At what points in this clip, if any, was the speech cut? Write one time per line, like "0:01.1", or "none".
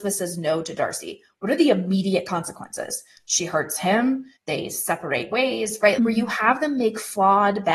0:04.4
0:06.0

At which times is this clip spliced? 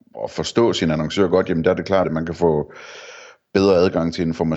0:02.0

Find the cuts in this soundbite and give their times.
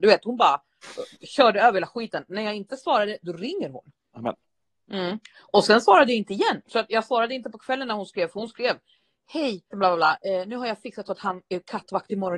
0:06.6
0:09.7

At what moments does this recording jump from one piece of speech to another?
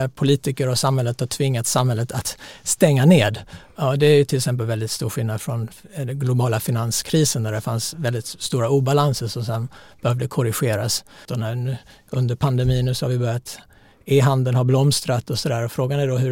0:11.3

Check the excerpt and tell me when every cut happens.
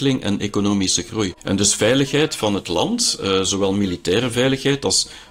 0:01.3

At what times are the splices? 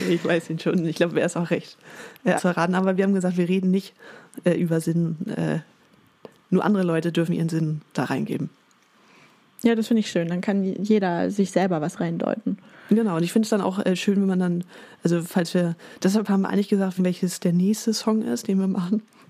0:02.4
0:17.0

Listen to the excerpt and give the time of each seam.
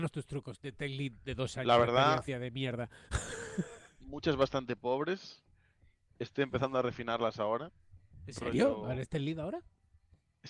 none

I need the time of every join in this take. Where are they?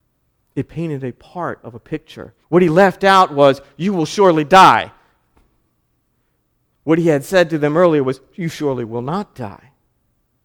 0:02.4

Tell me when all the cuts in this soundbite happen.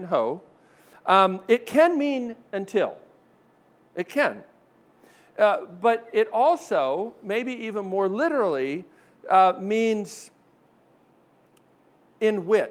none

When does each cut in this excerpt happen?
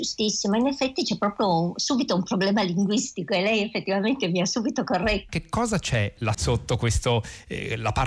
0:05.3
0:06.3

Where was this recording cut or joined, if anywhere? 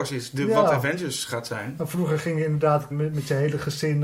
0:02.9

